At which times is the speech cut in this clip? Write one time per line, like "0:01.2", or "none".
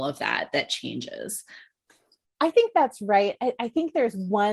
none